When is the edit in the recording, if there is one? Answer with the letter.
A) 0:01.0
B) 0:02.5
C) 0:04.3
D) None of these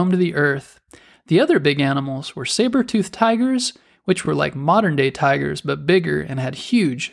D